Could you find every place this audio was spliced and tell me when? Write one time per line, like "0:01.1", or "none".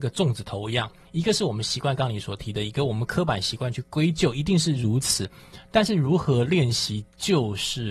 0:01.1